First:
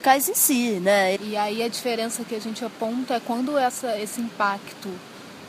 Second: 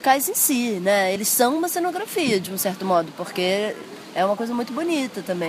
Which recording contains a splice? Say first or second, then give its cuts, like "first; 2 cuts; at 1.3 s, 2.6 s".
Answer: first; 1 cut; at 1.2 s